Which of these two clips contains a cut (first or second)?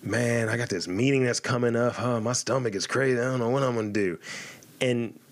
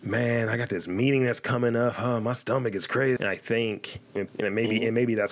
second